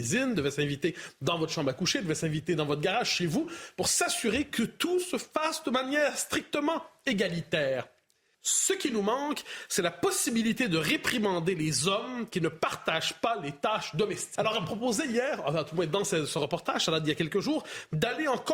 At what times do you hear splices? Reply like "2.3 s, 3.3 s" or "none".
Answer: 8.3 s, 14.4 s